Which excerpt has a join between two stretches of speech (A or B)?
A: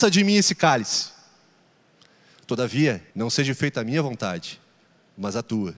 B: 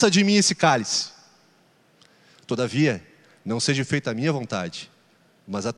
A